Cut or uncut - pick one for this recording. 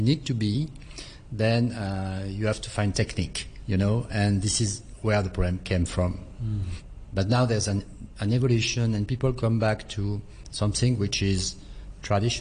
uncut